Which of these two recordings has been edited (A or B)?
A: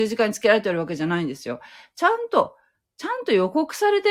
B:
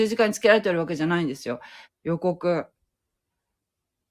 B